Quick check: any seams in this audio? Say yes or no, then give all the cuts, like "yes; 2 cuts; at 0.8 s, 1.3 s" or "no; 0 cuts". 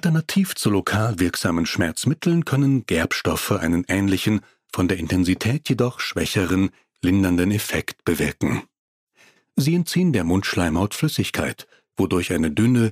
no; 0 cuts